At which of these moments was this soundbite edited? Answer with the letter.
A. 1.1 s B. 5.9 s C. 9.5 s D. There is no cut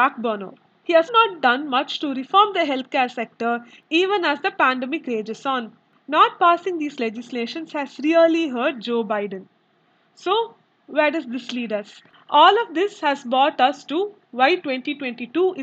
A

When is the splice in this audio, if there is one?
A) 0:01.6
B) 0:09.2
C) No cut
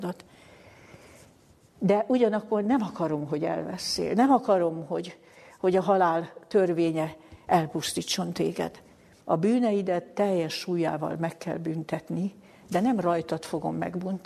B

